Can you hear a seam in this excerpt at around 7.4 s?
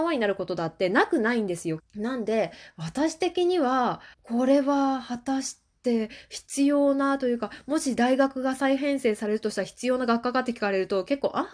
no; 2 cuts; at 1.8 s, 4.1 s

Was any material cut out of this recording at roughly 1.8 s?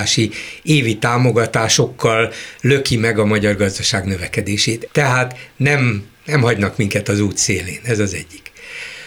no; 1 cut; at 4.9 s

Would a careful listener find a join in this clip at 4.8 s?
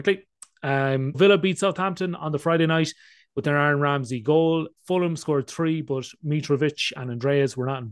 no; 1 cut; at 1.1 s

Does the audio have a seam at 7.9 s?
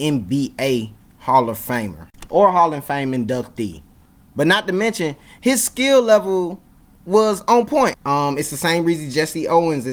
yes; 1 cut; at 7.9 s

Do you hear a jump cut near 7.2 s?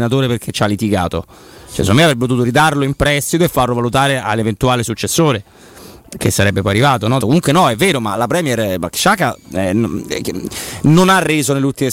yes; 1 cut; at 7.2 s

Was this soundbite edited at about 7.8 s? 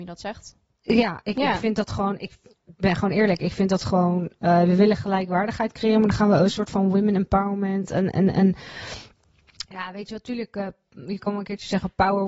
no; 0 cuts

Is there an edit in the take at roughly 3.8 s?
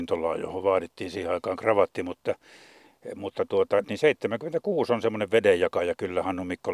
yes; 1 cut; at 3.8 s

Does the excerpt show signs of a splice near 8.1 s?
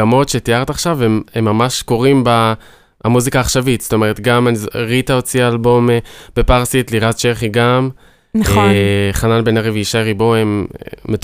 no; 0 cuts

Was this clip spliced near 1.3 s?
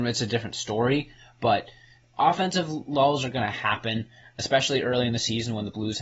no; 0 cuts

